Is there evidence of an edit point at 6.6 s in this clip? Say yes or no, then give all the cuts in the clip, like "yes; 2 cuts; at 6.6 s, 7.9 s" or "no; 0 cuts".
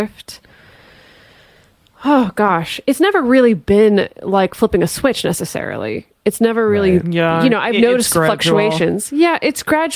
no; 0 cuts